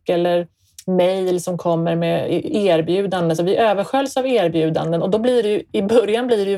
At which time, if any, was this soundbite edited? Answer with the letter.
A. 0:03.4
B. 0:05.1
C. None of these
C